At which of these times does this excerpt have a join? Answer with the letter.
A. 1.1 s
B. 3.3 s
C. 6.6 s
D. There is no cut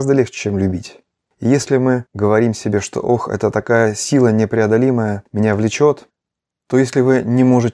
D